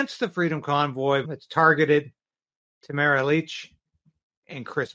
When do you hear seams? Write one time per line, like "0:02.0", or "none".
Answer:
0:01.2